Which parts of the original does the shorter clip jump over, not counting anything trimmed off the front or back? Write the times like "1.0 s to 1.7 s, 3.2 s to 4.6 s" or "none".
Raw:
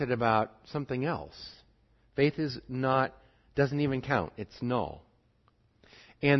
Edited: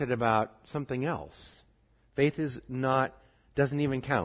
none